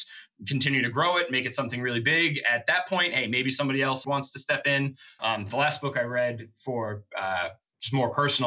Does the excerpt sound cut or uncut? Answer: cut